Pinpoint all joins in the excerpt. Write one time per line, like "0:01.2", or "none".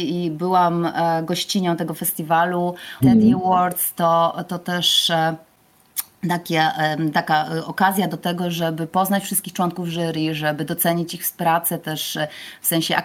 0:03.0